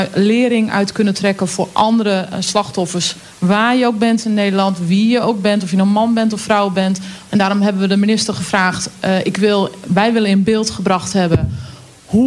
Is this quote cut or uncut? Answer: cut